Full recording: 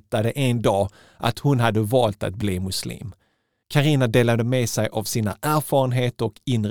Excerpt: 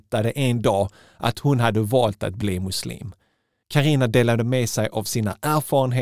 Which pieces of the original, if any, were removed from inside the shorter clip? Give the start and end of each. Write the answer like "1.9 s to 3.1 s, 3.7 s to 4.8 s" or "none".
none